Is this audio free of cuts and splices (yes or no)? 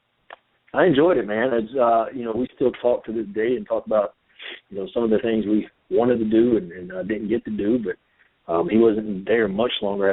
yes